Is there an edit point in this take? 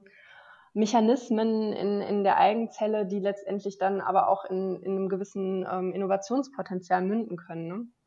no; 0 cuts

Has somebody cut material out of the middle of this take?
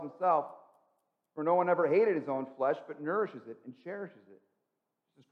no; 0 cuts

